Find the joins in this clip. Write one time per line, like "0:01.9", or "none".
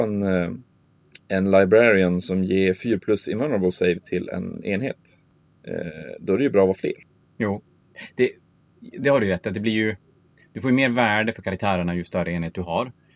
none